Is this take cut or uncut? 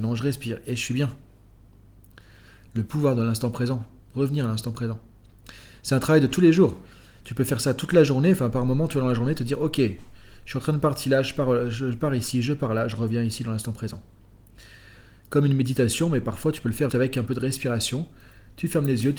cut